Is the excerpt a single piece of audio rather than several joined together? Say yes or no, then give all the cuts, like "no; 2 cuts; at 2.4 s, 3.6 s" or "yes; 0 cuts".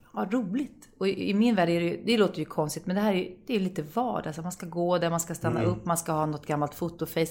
yes; 0 cuts